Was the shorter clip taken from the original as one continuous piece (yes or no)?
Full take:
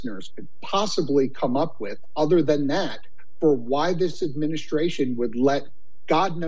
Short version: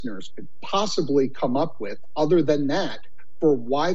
yes